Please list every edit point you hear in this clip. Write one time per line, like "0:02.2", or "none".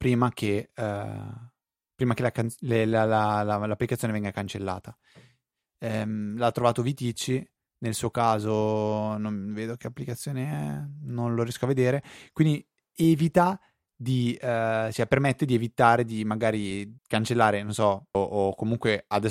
0:17.0
0:18.1

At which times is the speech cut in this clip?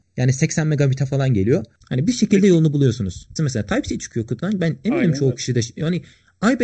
0:01.8
0:03.4

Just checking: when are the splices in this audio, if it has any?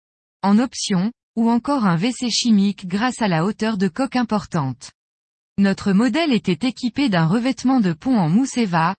0:01.2

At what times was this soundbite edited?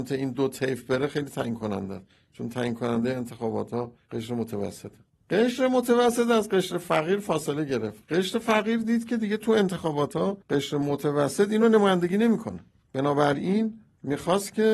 0:10.4

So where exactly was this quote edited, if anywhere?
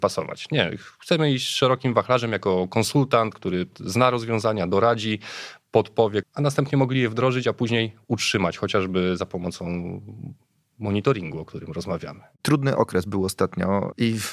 0:06.2

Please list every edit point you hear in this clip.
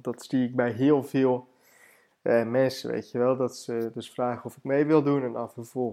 none

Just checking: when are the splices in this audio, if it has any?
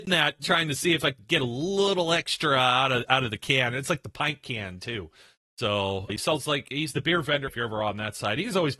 0:06.1
0:07.5

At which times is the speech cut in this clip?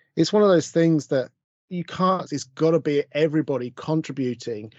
0:02.2

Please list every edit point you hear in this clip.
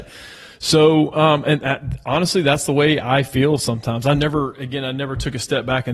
none

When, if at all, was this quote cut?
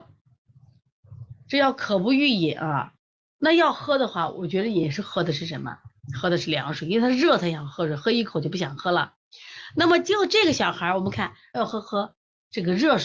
0:11.5

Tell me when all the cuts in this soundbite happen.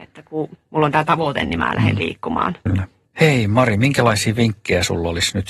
0:02.7

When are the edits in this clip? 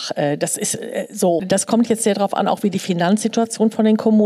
0:01.4

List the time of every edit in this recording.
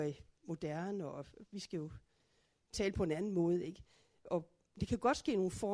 none

